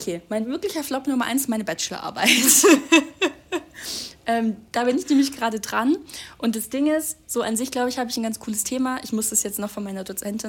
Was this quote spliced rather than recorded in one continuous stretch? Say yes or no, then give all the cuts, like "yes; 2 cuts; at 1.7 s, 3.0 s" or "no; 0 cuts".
no; 0 cuts